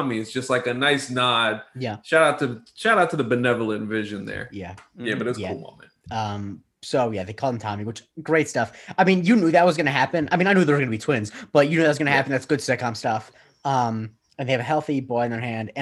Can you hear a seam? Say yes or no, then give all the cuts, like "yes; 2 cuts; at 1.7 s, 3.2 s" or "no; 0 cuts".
no; 0 cuts